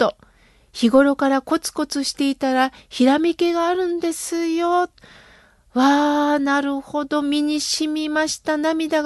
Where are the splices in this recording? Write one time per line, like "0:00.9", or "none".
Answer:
none